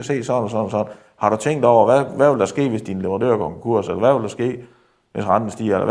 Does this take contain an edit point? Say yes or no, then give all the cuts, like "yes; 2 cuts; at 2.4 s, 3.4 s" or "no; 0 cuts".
no; 0 cuts